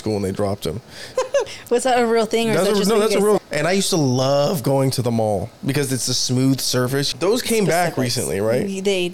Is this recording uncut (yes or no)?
no